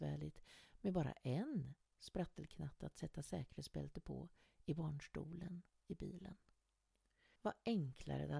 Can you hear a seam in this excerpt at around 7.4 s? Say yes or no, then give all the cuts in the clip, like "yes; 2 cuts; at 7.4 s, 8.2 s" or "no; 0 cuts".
yes; 1 cut; at 7.4 s